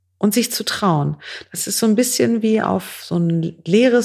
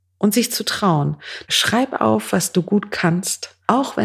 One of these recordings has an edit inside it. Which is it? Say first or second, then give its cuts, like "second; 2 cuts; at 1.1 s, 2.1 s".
second; 1 cut; at 1.4 s